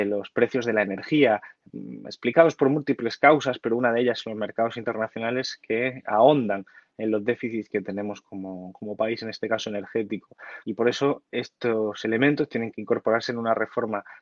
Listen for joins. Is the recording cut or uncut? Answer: cut